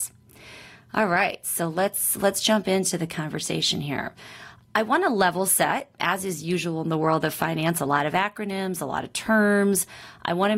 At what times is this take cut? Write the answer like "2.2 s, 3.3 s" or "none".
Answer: none